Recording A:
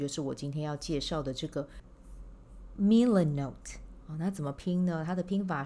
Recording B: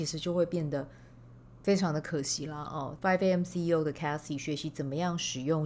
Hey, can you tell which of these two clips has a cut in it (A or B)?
B